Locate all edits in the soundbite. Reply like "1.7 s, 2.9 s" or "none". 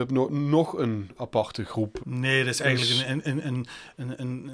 2.0 s